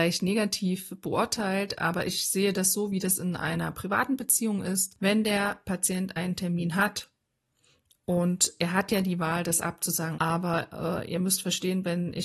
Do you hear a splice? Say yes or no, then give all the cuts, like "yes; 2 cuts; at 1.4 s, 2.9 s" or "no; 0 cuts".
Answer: yes; 2 cuts; at 5.0 s, 10.1 s